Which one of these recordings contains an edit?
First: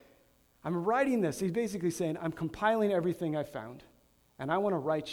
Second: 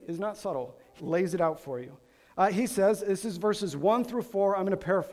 second; 1 cut; at 1.0 s

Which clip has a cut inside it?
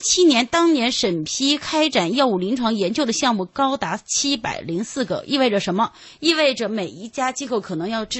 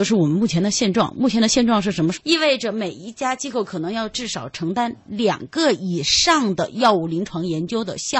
second; 1 cut; at 2.1 s

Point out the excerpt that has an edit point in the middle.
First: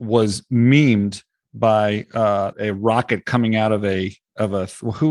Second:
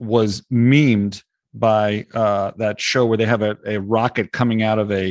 first; 1 cut; at 2.5 s

